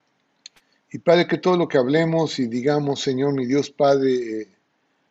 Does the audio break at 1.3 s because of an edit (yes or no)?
no